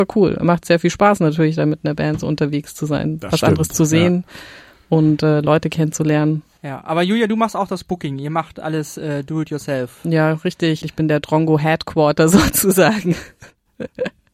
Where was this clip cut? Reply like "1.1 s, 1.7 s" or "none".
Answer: 10.8 s

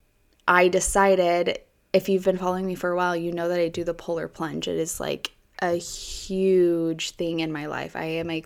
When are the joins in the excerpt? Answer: none

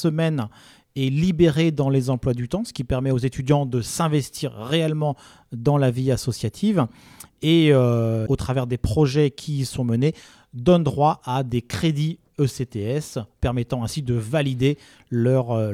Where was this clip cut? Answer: 8.3 s

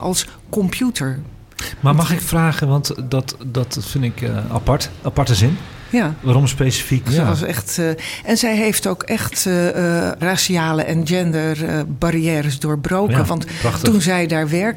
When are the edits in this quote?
7.0 s, 10.2 s

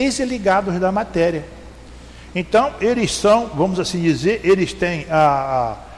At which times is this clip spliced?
none

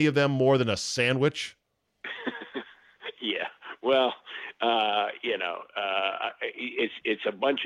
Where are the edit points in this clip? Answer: none

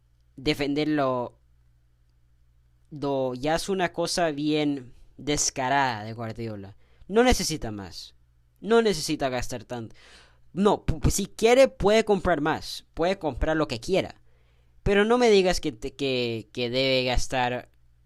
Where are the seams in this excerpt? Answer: none

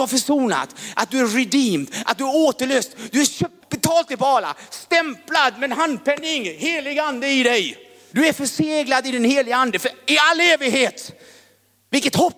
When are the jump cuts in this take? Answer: 3.6 s, 8.1 s

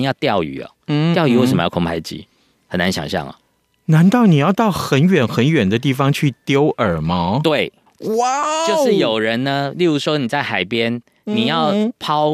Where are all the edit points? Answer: none

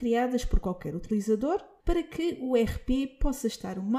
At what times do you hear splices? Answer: 1.8 s

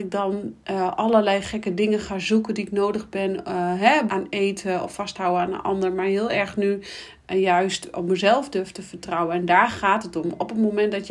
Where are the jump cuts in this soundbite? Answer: 4.1 s

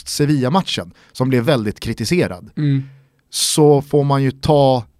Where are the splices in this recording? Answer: 1.5 s

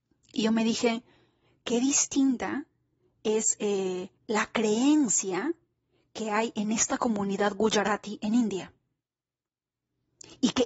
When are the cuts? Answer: 4.2 s

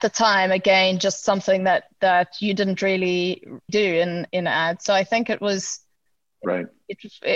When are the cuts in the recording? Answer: 3.7 s

